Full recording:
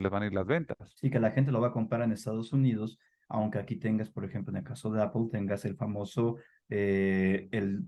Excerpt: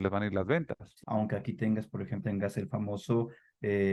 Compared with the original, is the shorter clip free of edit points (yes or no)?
no